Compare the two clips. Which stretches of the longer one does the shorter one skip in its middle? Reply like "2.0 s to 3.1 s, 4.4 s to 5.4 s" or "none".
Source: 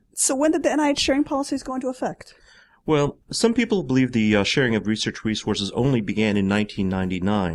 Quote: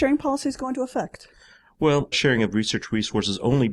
3.2 s to 4.4 s

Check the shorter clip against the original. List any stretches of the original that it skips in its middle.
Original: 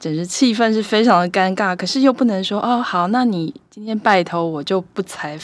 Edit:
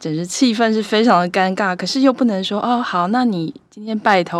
none

